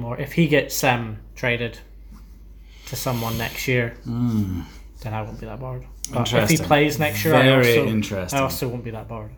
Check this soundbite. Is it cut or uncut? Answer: uncut